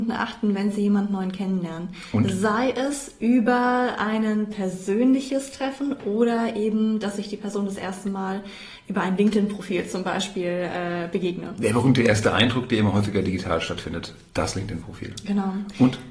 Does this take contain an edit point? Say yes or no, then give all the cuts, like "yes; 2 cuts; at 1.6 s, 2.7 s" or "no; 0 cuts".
no; 0 cuts